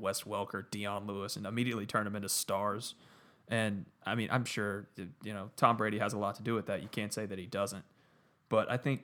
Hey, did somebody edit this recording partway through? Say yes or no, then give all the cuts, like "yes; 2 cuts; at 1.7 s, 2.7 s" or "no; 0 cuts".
no; 0 cuts